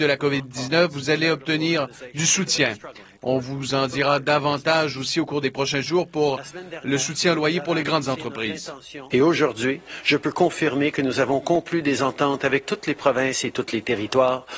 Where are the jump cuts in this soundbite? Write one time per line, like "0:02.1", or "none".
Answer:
0:03.2
0:09.1